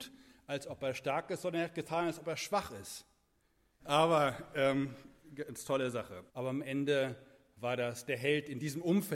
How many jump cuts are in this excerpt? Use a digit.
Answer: 2